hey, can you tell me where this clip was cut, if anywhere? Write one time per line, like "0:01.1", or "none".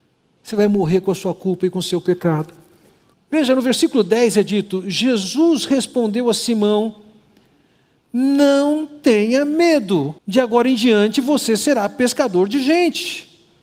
0:03.1
0:10.2